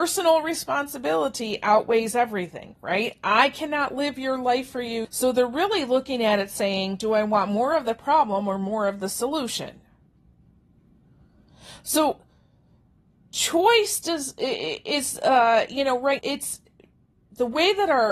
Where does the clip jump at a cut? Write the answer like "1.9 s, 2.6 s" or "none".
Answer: 5.0 s, 16.2 s